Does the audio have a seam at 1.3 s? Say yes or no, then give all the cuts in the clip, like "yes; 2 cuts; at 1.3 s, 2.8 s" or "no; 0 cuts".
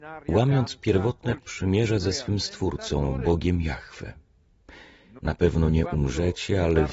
no; 1 cut; at 5.2 s